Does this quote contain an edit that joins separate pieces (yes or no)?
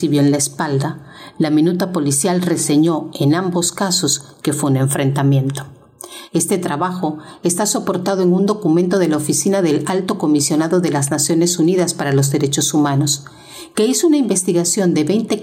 yes